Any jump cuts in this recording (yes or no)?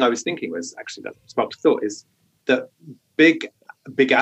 no